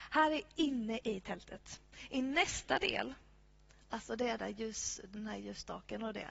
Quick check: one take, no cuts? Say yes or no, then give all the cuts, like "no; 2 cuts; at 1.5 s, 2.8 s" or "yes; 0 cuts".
no; 1 cut; at 4.4 s